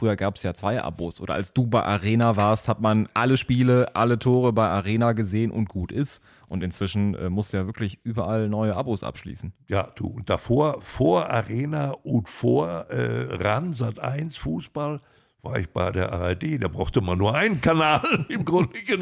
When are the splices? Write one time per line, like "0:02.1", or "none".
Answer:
none